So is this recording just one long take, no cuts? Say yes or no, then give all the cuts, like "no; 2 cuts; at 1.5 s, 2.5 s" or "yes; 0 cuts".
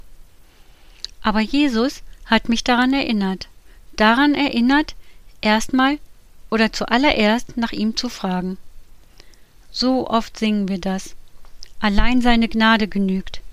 yes; 0 cuts